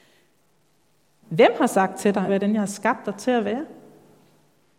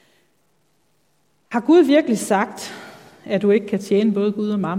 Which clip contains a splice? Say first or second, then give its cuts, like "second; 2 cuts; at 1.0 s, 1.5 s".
first; 2 cuts; at 1.2 s, 2.3 s